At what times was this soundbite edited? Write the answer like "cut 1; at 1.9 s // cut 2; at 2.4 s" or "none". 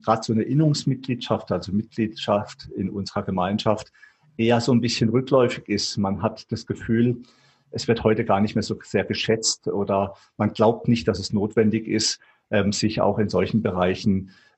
none